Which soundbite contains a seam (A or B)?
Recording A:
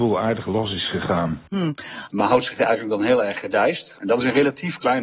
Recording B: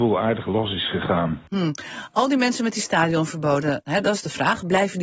A